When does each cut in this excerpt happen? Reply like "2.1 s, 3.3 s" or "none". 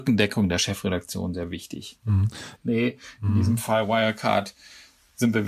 1.3 s, 2.6 s